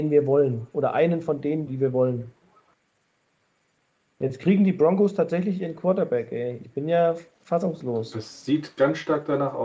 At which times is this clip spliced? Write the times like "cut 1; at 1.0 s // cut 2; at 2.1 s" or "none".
cut 1; at 1.7 s